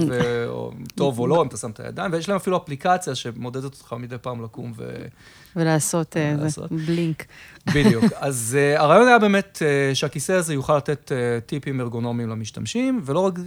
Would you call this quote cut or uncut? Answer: uncut